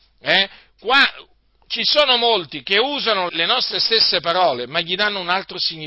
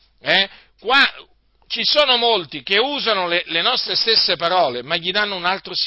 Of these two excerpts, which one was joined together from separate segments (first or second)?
first